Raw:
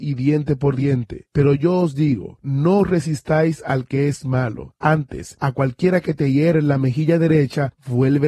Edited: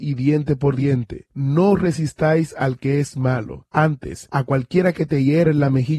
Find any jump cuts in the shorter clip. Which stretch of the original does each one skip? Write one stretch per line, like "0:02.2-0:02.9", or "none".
0:01.3-0:02.4